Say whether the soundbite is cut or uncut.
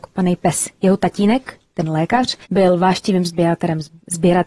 cut